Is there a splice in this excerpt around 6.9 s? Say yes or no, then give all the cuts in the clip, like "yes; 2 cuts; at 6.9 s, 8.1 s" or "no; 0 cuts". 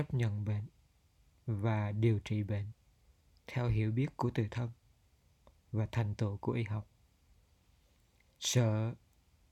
no; 0 cuts